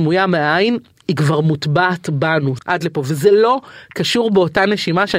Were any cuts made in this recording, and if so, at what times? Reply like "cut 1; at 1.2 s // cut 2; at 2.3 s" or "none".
cut 1; at 2.6 s

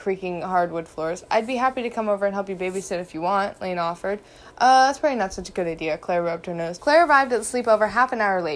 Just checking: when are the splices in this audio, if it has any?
cut 1; at 6.8 s

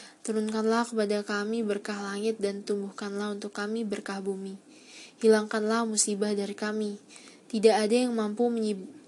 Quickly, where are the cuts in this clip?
none

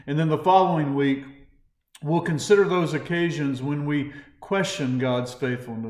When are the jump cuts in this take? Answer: none

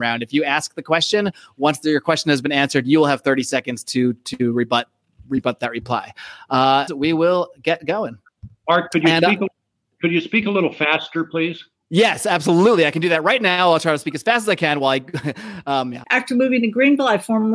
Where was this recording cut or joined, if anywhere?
cut 1; at 6.9 s // cut 2; at 16.0 s

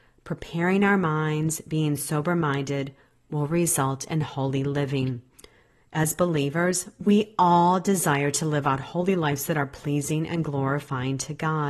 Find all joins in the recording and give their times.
none

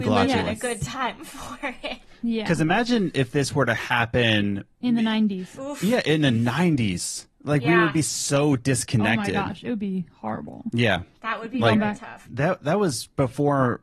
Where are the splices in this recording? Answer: cut 1; at 4.7 s // cut 2; at 12.2 s

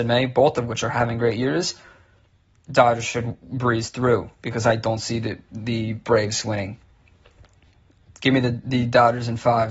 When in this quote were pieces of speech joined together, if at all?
none

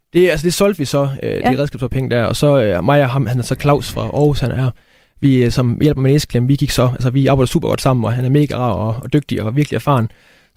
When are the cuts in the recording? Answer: cut 1; at 8.1 s

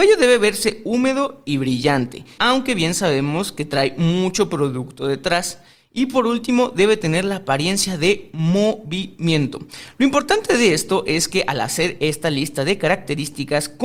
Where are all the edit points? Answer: cut 1; at 2.4 s

